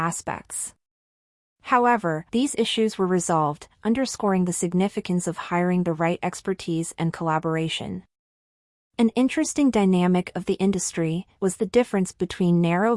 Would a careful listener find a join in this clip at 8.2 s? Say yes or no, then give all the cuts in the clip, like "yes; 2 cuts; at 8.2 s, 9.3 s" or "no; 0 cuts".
no; 2 cuts; at 2.3 s, 11.4 s